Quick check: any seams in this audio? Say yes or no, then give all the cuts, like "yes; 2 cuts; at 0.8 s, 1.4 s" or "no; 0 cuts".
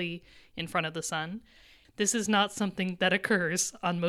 yes; 1 cut; at 1.8 s